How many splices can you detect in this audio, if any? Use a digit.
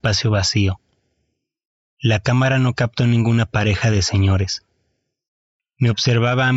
0